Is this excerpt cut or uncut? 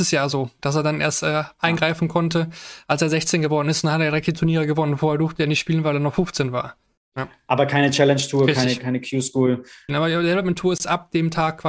cut